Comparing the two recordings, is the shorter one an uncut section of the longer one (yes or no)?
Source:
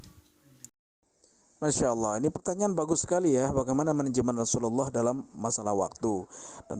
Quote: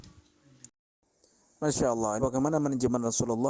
no